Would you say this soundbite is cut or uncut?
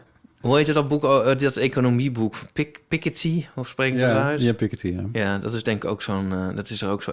uncut